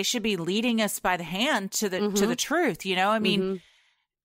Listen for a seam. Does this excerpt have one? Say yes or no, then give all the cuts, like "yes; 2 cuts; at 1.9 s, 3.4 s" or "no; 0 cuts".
no; 0 cuts